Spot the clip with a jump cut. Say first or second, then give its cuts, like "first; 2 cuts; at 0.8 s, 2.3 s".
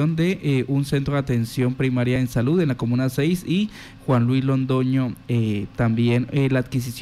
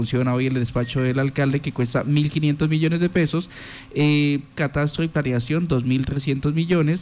second; 1 cut; at 4.5 s